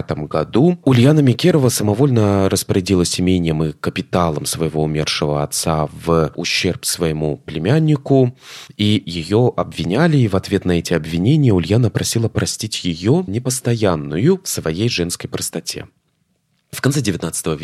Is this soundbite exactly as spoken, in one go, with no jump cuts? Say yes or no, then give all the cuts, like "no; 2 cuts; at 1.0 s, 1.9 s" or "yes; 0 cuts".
no; 1 cut; at 13.3 s